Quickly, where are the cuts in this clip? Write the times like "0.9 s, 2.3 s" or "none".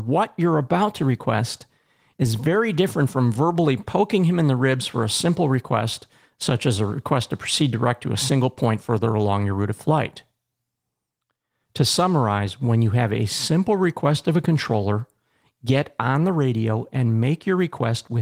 none